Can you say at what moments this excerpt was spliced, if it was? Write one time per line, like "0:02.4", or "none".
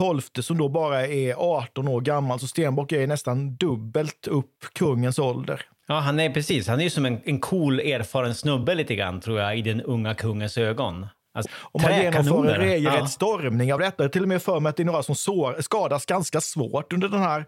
0:11.4

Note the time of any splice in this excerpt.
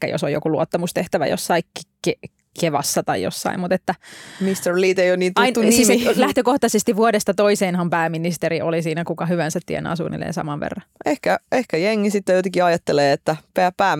none

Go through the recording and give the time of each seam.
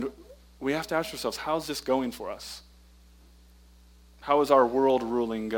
none

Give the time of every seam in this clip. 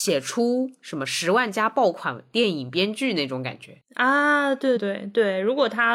0:04.8

